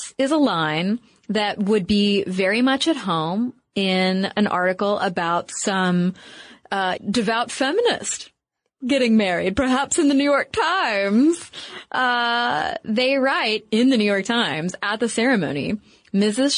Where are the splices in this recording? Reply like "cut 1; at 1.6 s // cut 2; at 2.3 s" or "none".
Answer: cut 1; at 7.0 s

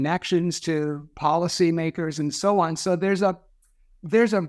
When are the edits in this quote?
none

